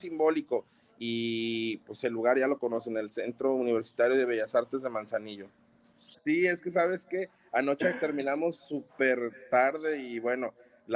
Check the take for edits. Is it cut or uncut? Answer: cut